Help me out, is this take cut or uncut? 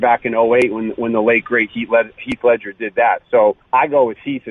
uncut